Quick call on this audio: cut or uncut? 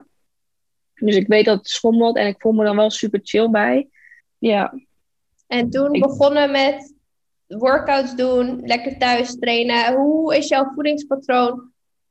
cut